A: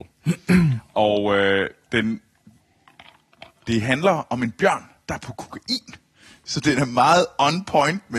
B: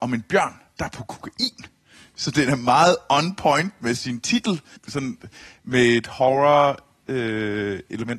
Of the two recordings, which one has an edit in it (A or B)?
B